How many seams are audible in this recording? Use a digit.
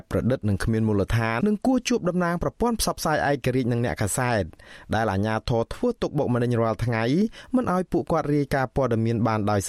1